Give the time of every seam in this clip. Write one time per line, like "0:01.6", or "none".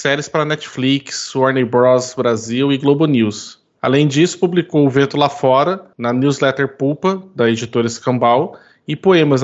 0:03.7

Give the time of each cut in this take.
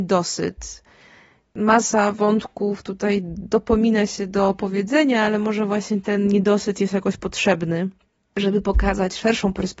none

